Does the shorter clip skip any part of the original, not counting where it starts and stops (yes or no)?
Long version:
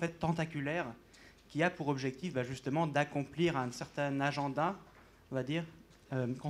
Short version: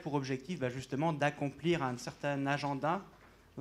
no